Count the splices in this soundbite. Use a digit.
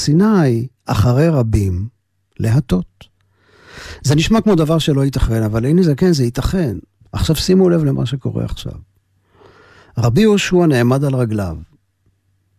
1